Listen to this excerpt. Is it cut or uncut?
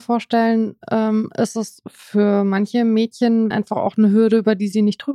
cut